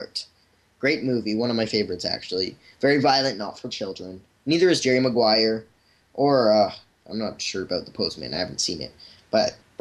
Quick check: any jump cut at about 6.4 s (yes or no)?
no